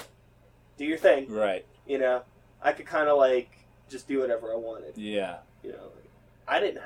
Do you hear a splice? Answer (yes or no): yes